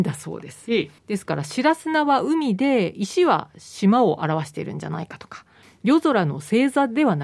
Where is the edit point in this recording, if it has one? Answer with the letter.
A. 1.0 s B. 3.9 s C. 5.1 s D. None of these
A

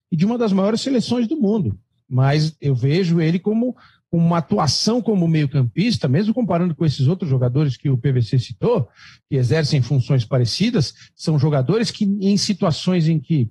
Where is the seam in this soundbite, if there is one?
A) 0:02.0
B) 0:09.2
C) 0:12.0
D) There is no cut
D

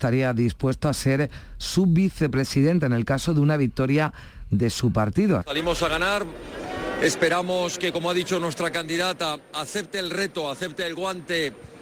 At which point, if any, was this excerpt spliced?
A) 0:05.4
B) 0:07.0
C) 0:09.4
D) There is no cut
A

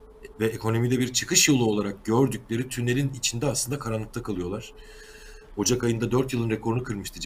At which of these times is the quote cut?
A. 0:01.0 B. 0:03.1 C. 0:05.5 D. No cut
C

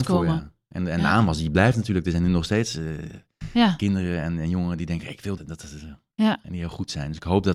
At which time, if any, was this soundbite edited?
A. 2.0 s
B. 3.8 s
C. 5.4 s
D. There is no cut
C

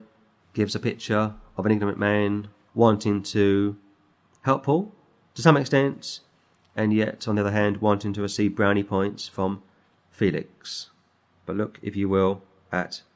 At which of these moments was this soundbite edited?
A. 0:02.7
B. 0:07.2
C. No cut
A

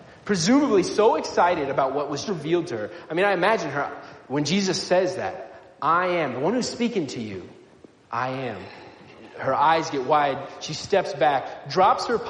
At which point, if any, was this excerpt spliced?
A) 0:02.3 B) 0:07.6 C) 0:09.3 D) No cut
A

